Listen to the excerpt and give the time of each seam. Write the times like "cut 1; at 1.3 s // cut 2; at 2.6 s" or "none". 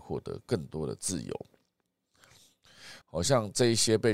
cut 1; at 3.0 s